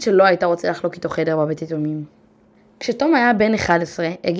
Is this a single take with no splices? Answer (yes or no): yes